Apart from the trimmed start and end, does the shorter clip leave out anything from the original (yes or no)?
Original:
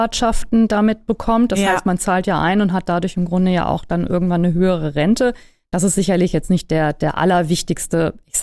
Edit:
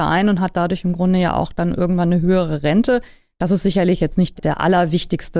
yes